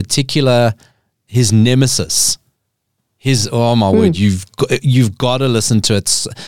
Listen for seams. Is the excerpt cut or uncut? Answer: uncut